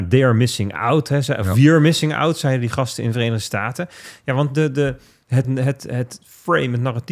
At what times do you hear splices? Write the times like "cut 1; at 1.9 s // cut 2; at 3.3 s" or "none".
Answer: cut 1; at 5.4 s